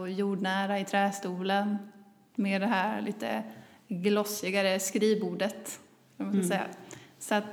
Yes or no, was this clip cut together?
no